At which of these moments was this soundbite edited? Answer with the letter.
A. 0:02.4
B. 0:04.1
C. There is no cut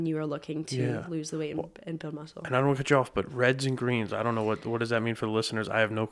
C